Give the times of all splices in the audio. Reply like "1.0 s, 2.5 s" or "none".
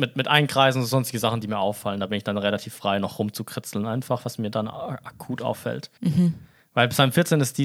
6.0 s